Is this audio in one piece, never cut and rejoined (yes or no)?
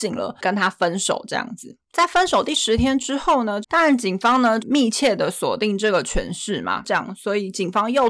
no